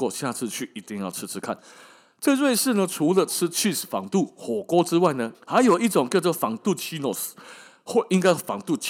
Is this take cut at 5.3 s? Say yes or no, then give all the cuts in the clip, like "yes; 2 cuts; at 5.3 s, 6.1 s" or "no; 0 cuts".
yes; 1 cut; at 5.3 s